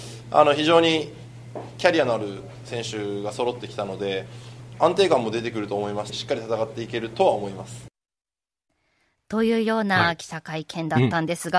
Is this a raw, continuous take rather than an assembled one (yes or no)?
no